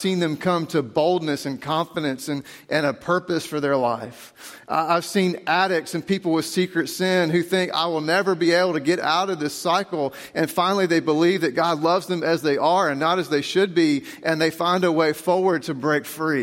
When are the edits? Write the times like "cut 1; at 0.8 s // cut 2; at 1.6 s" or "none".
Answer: none